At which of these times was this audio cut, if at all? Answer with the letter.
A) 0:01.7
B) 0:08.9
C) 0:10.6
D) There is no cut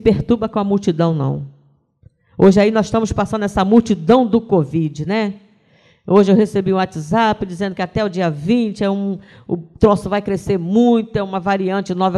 D